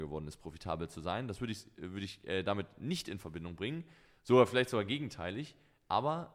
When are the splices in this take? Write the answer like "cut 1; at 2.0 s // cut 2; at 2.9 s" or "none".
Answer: none